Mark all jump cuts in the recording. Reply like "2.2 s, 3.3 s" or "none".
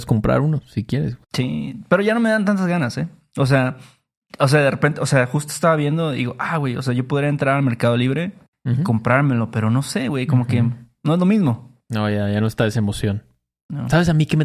none

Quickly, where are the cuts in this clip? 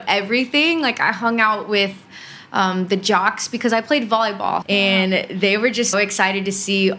4.6 s, 5.9 s

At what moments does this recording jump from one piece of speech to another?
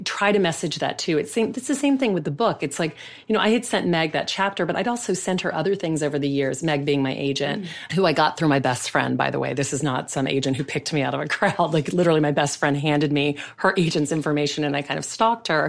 none

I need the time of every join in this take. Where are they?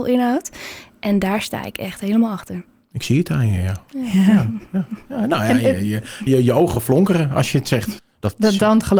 6.3 s, 8.0 s

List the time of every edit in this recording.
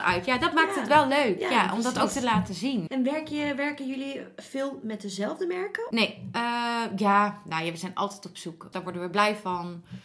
2.9 s, 5.9 s, 8.7 s

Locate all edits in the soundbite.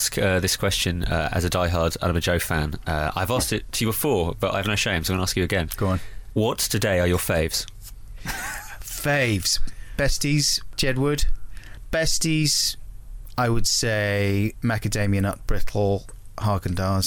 10.7 s

